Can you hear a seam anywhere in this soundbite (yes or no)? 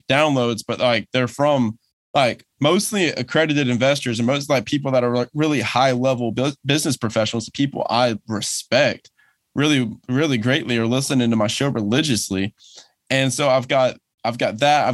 no